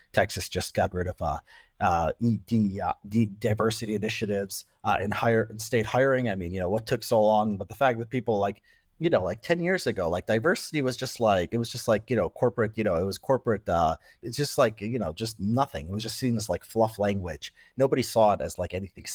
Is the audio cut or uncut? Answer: uncut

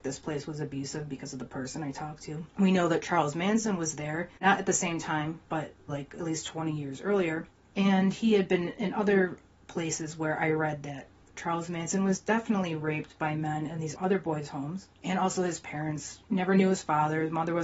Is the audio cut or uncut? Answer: cut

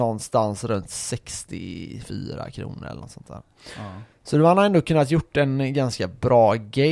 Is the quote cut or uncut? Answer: uncut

